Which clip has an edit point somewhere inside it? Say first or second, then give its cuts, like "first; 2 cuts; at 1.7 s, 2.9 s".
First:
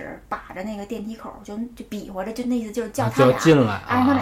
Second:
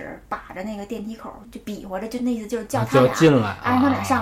second; 1 cut; at 1.4 s